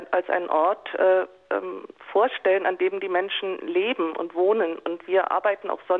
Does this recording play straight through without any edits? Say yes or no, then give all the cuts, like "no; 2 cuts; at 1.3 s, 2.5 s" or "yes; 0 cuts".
yes; 0 cuts